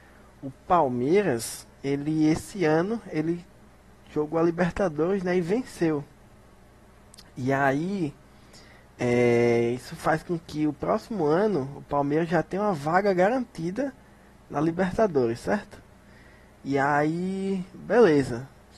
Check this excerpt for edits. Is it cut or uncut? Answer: uncut